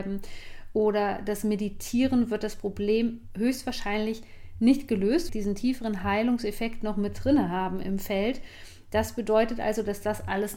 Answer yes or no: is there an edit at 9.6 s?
no